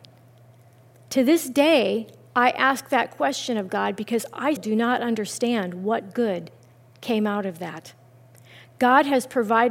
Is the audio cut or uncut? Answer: cut